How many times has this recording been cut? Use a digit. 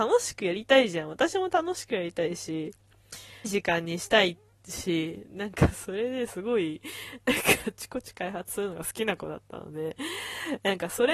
1